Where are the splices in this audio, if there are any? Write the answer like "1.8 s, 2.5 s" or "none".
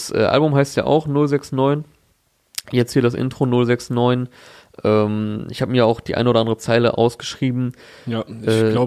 none